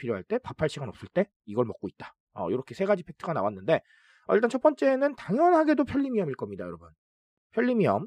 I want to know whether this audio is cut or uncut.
uncut